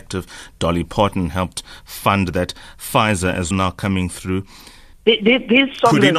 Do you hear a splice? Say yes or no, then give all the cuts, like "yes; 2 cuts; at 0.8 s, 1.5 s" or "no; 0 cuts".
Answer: yes; 2 cuts; at 3.5 s, 4.9 s